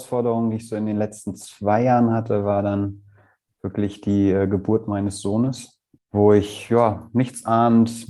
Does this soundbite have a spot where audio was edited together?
yes; 1 cut; at 6.0 s

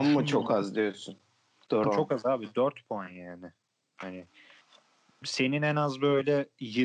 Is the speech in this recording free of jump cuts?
no; 1 cut; at 1.8 s

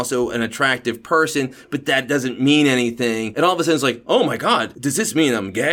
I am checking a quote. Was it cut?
no; 0 cuts

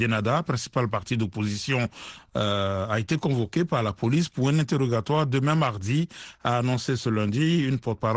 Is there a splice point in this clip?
no; 0 cuts

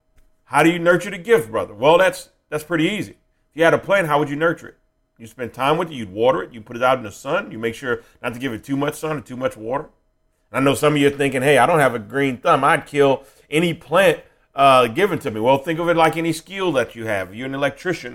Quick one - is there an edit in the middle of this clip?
no; 0 cuts

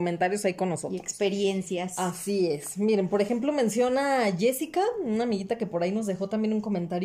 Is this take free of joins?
yes; 0 cuts

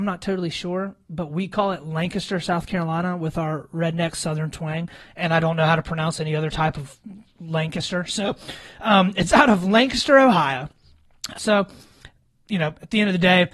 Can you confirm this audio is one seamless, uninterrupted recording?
no; 1 cut; at 11.3 s

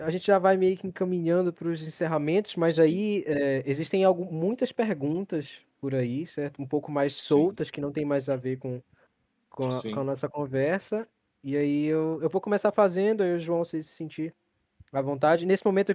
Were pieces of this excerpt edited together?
no; 0 cuts

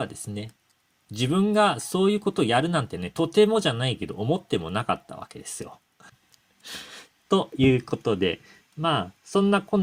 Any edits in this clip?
yes; 1 cut; at 6.1 s

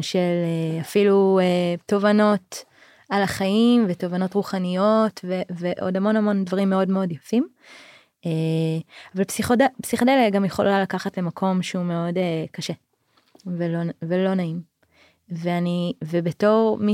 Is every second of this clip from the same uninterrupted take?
yes; 0 cuts

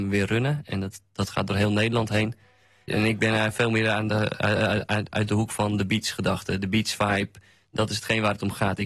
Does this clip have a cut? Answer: yes; 1 cut; at 2.9 s

